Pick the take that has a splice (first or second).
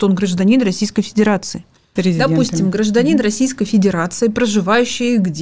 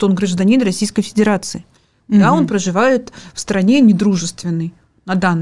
first